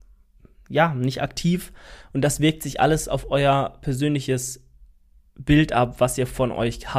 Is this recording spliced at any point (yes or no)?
no